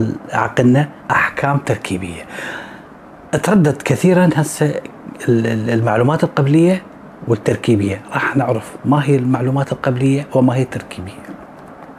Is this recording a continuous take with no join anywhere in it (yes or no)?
no